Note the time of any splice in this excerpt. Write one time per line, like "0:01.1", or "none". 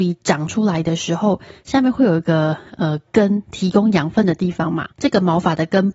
0:04.9